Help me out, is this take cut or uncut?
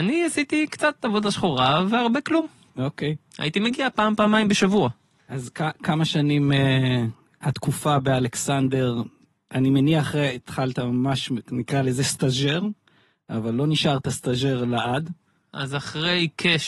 uncut